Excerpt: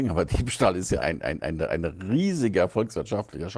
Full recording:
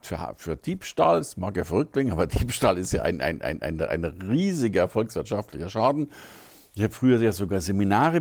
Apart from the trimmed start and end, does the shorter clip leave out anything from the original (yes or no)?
yes